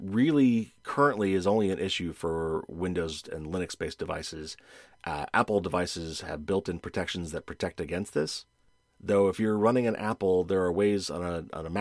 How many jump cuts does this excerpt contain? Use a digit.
0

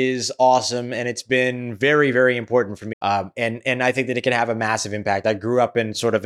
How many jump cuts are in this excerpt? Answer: 1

